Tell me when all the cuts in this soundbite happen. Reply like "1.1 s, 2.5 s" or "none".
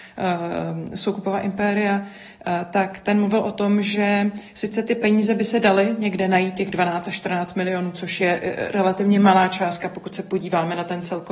none